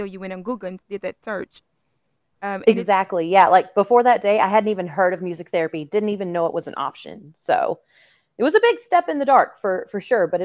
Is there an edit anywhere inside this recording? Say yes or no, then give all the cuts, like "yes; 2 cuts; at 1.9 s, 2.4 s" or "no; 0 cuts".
no; 0 cuts